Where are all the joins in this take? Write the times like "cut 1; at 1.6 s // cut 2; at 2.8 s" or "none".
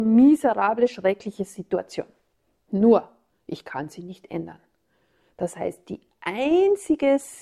none